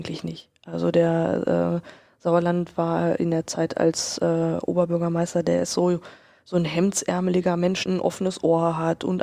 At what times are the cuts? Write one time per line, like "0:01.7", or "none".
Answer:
0:07.9